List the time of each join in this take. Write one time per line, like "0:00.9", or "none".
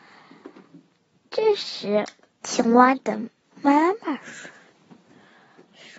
0:02.4